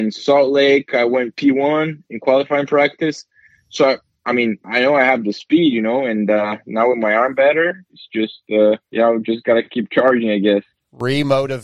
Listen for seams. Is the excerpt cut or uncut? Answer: cut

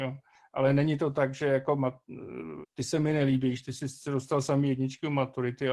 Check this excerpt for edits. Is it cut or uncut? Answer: cut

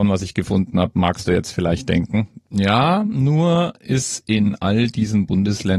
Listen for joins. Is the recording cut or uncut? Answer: uncut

